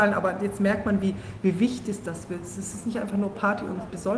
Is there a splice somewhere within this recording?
no; 0 cuts

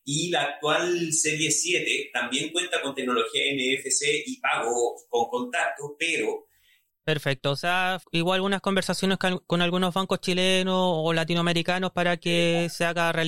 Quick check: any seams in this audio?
yes; 2 cuts; at 6.9 s, 8.0 s

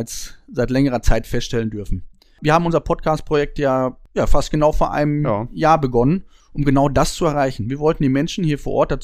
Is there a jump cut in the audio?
no; 0 cuts

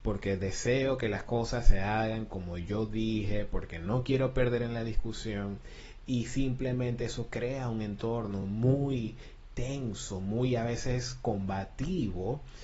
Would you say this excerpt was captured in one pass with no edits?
yes; 0 cuts

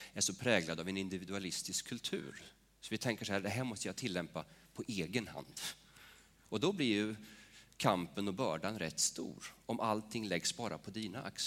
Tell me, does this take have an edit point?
no; 0 cuts

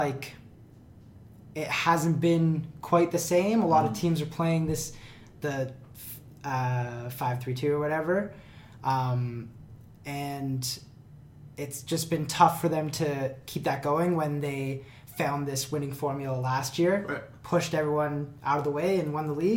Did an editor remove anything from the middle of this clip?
no; 0 cuts

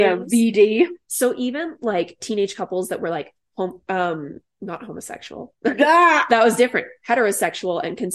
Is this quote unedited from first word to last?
yes; 0 cuts

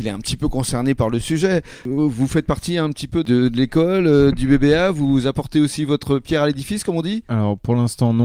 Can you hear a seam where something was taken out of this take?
no; 0 cuts

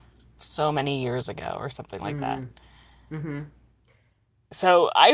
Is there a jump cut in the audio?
no; 0 cuts

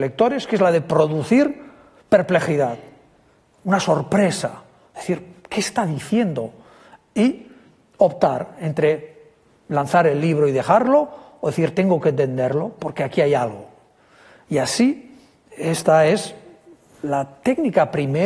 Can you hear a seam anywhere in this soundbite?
no; 0 cuts

